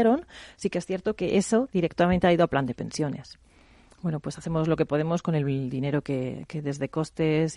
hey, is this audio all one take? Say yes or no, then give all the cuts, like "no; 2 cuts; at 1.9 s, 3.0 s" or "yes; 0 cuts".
yes; 0 cuts